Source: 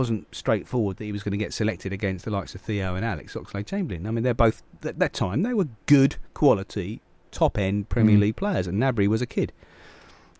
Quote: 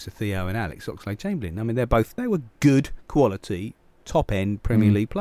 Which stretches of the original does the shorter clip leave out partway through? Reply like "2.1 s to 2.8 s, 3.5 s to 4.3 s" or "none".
4.7 s to 5.4 s